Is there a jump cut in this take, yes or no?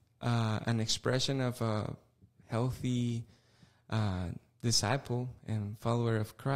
no